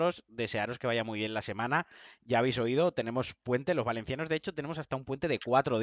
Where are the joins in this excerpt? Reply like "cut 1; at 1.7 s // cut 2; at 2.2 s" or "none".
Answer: none